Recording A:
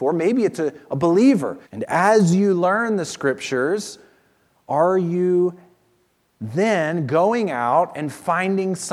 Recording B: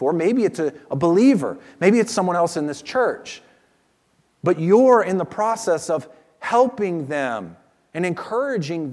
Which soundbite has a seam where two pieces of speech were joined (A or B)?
A